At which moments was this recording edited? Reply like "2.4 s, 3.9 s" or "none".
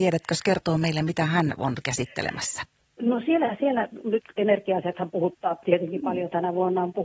5.6 s